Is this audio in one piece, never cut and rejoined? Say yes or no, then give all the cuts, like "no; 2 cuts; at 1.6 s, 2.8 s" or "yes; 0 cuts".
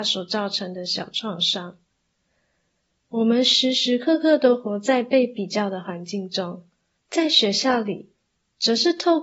no; 2 cuts; at 2.9 s, 7.0 s